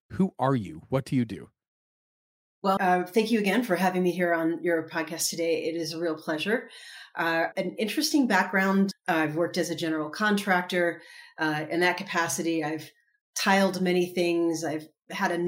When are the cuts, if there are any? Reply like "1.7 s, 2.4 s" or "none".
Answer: 2.8 s, 7.5 s, 8.9 s

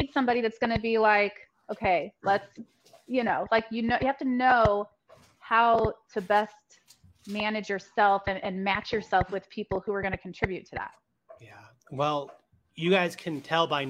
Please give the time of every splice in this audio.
none

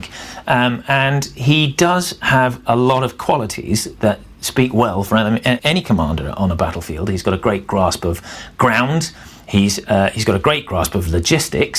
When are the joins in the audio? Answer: 5.6 s

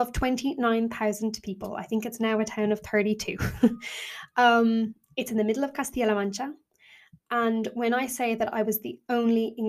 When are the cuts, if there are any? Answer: none

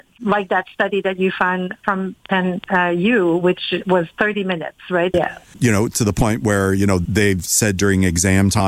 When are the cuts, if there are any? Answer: 5.1 s

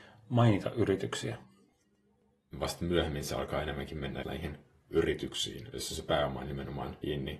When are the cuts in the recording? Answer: 2.5 s, 4.2 s

